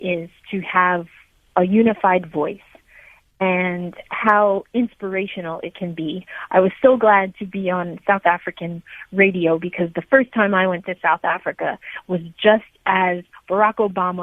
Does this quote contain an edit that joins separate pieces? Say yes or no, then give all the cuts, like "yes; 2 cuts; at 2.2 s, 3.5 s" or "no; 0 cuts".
yes; 1 cut; at 7.3 s